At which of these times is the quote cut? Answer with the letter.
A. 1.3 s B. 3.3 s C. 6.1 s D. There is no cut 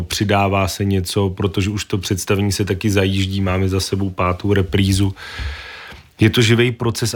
D